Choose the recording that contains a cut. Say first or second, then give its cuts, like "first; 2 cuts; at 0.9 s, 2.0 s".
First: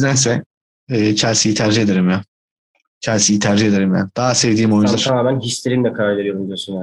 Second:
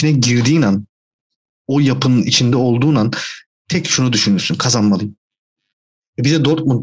first; 1 cut; at 5.0 s